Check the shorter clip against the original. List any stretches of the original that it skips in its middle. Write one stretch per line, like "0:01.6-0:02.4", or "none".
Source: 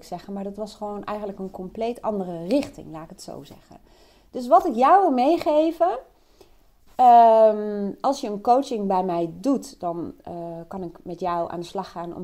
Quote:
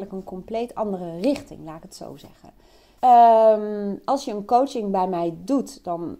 0:04.2-0:06.9